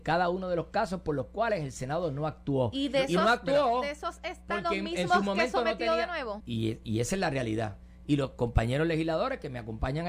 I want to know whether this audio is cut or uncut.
cut